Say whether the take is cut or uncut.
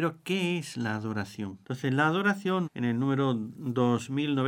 cut